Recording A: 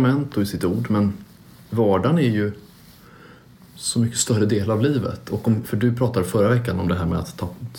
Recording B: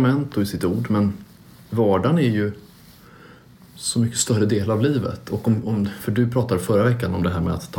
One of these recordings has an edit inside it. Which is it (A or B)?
A